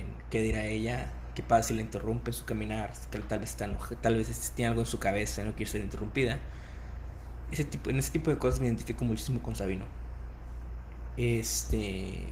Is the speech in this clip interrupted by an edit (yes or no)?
no